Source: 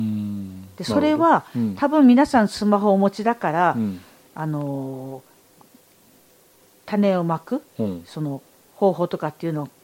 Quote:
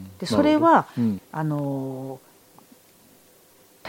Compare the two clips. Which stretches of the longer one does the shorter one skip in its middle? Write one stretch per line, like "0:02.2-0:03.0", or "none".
0:01.8-0:04.2